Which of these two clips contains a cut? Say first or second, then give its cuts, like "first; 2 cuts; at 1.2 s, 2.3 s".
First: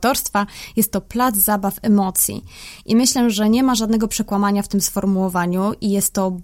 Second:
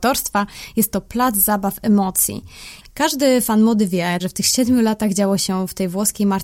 second; 2 cuts; at 2.8 s, 4.2 s